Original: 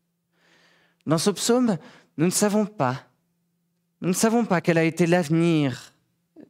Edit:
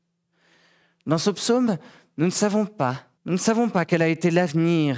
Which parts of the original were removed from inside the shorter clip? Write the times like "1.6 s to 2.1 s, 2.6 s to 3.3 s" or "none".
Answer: 3.2 s to 3.9 s